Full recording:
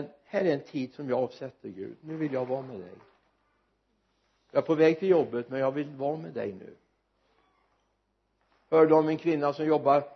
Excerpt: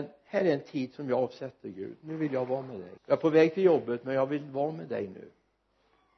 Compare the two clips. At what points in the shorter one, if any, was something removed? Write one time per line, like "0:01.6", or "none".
0:03.0